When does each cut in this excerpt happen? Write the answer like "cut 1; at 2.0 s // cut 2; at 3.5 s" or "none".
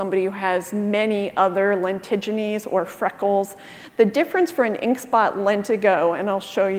none